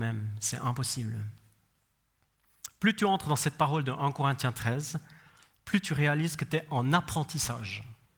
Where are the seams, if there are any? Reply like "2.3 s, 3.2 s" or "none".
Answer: none